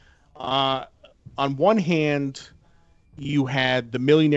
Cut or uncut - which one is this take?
uncut